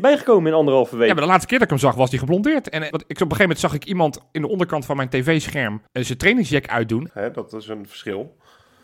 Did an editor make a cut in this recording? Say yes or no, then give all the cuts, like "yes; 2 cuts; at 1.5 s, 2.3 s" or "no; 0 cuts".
yes; 3 cuts; at 2.9 s, 5.9 s, 7.1 s